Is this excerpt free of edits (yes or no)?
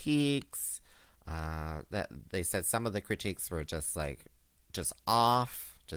yes